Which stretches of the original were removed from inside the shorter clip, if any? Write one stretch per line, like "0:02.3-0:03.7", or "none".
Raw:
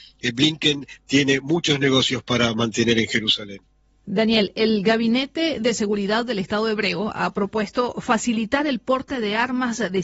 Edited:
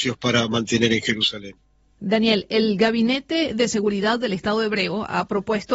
none